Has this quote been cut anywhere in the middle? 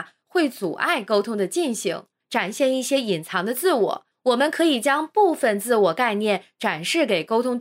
yes; 2 cuts; at 2.2 s, 4.1 s

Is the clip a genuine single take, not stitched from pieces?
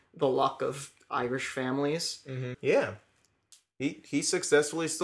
no; 1 cut; at 2.5 s

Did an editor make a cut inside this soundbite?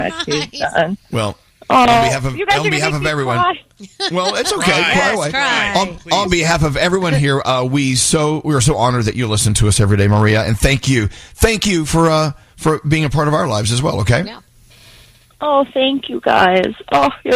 no; 0 cuts

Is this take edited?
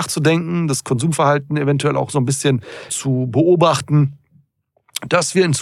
yes; 1 cut; at 2.9 s

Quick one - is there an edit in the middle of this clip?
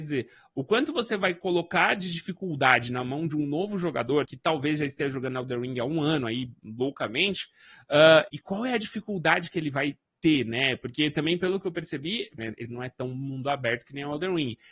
yes; 3 cuts; at 4.2 s, 8.3 s, 12.4 s

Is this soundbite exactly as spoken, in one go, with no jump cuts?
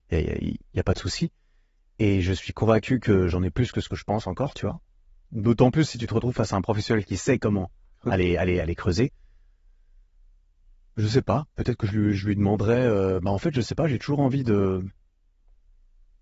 no; 1 cut; at 8.6 s

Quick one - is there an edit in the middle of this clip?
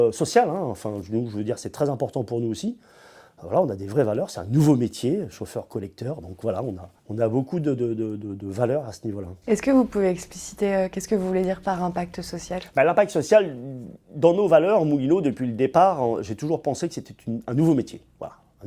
yes; 1 cut; at 7.0 s

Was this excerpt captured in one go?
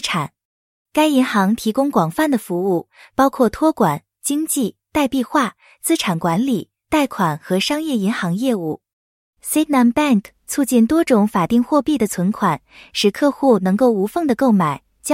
yes; 0 cuts

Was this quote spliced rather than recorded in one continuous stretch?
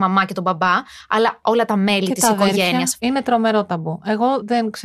yes; 1 cut; at 3.0 s

